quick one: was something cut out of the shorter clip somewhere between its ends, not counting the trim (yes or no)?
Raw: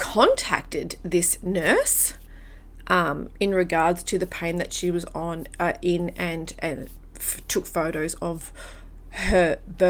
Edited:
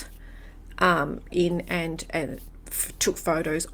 yes